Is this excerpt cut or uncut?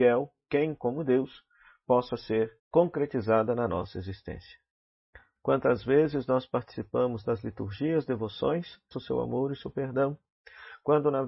cut